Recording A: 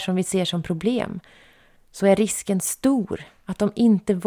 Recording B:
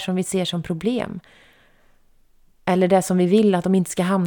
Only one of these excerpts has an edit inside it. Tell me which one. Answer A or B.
A